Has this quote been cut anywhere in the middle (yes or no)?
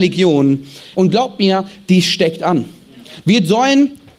yes